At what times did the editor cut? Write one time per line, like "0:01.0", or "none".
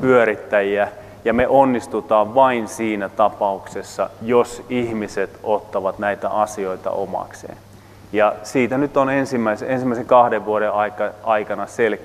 none